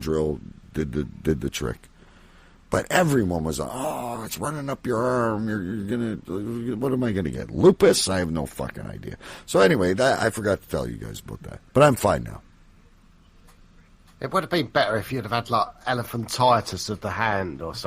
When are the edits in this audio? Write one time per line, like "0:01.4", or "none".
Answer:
0:11.7